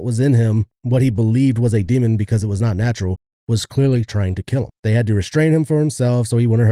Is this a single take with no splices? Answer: no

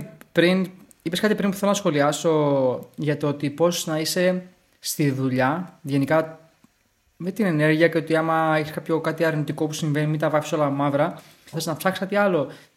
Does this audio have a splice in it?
yes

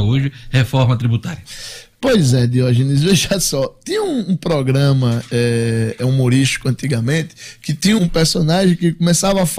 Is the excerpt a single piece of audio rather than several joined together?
no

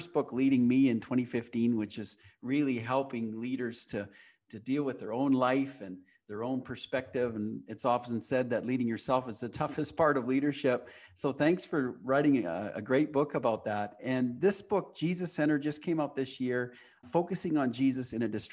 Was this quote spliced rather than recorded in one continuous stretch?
yes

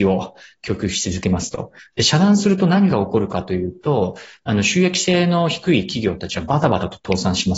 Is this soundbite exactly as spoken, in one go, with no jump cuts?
no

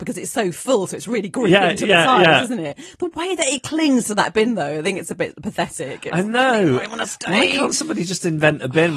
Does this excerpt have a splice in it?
no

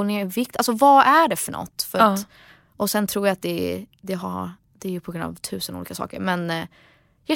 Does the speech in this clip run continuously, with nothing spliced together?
yes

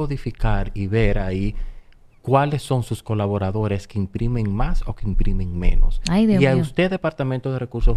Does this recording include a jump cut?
no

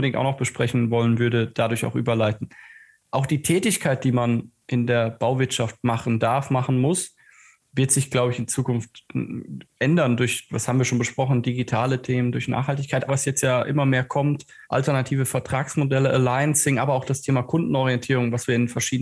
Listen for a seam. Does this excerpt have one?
yes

